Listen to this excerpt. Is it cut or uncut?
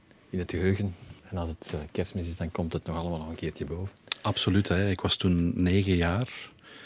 cut